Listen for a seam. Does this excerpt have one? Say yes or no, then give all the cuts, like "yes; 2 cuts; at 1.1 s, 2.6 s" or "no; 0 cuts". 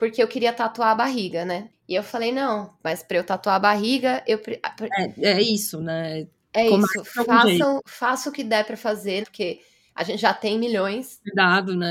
yes; 3 cuts; at 4.9 s, 7.8 s, 9.2 s